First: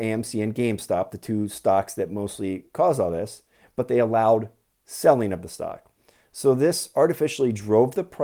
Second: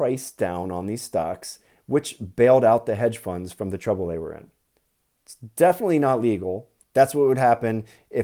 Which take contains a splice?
second; 1 cut; at 6.8 s

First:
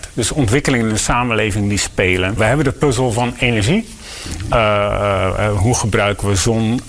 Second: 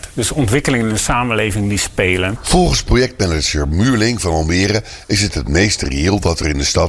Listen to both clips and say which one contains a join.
second; 1 cut; at 2.4 s

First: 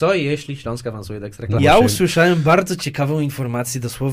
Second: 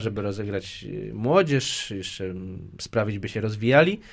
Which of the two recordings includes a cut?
first; 1 cut; at 1.6 s

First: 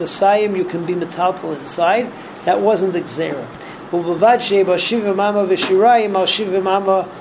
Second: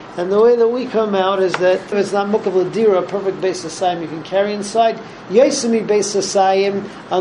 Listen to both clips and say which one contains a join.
second; 1 cut; at 1.9 s

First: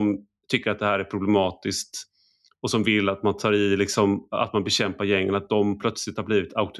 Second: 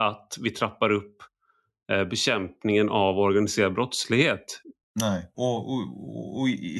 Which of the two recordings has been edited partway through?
second; 1 cut; at 5.3 s

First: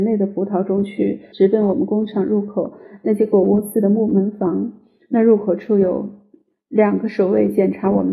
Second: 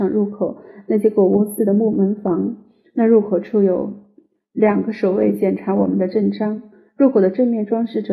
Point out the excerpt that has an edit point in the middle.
first; 1 cut; at 1.3 s

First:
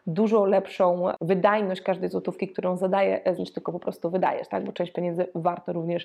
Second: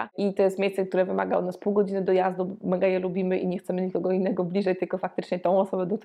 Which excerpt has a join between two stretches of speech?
first; 1 cut; at 3.4 s

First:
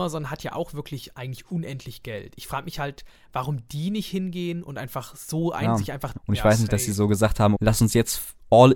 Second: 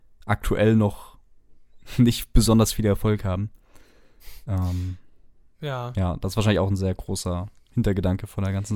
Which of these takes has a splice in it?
first; 2 cuts; at 6.2 s, 7.5 s

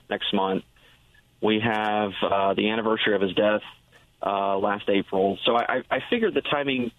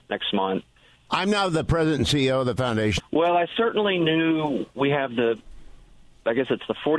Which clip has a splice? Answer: second; 2 cuts; at 1.1 s, 3.0 s

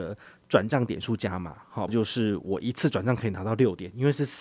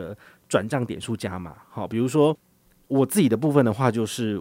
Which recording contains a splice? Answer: first; 1 cut; at 1.9 s

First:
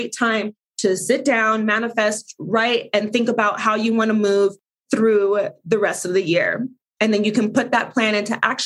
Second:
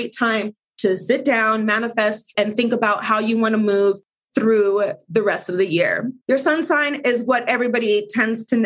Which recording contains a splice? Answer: second; 2 cuts; at 2.3 s, 6.2 s

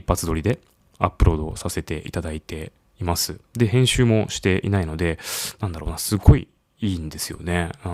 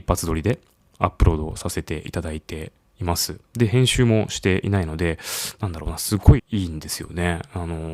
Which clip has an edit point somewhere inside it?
second; 1 cut; at 6.4 s

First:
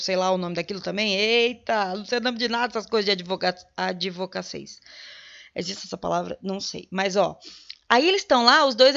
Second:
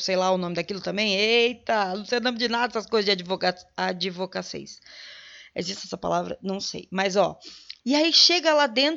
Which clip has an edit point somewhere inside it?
second; 1 cut; at 7.8 s

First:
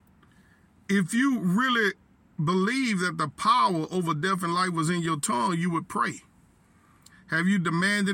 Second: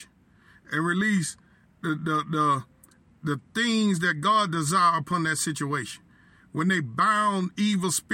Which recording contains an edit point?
first; 1 cut; at 7.1 s

